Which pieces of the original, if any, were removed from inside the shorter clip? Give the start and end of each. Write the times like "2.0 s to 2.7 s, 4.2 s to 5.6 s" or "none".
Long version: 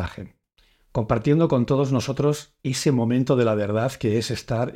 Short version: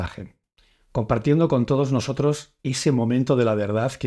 none